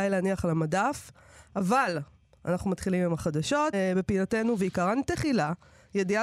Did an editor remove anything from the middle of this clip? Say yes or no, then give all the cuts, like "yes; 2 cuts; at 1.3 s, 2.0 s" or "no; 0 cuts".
yes; 1 cut; at 3.7 s